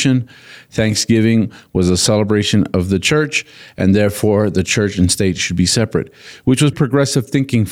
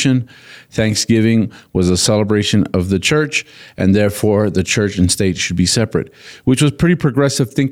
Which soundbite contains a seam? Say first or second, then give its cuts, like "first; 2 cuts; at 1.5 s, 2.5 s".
first; 1 cut; at 6.7 s